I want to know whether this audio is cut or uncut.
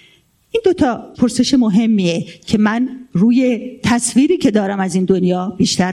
cut